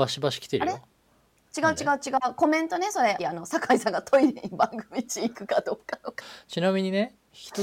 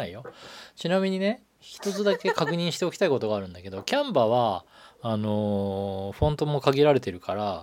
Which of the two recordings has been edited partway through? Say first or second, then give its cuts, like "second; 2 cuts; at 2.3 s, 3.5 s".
first; 2 cuts; at 3.2 s, 6.2 s